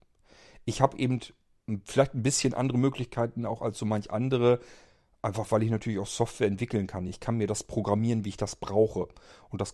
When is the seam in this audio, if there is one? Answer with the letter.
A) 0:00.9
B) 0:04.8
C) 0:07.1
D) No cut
D